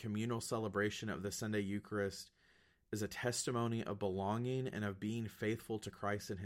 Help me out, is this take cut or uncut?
uncut